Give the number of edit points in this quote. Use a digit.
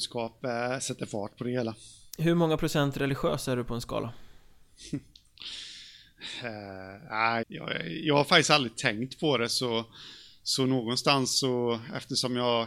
1